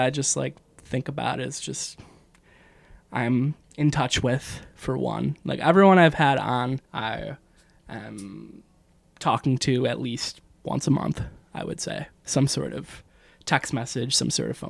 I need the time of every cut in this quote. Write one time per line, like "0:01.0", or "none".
0:06.8